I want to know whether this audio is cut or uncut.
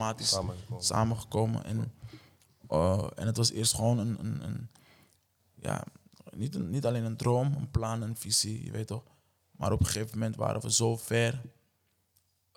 uncut